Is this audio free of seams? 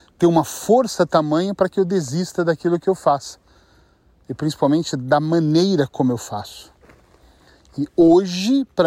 yes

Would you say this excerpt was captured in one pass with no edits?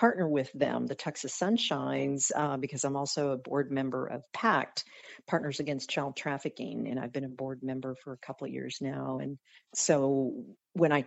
yes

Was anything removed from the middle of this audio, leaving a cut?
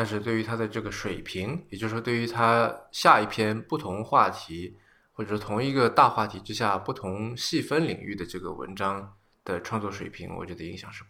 no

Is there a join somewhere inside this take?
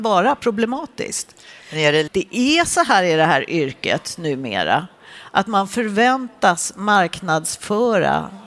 yes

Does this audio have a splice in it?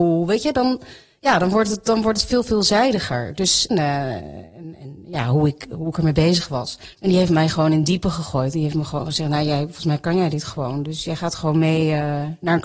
yes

